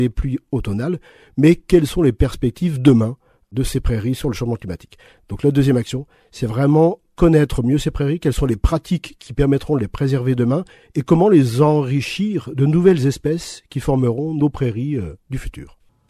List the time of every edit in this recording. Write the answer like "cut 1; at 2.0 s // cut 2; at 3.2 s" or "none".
none